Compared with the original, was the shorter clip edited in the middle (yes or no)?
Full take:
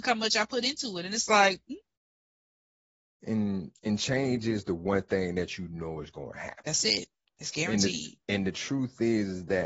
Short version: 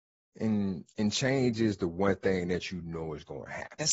no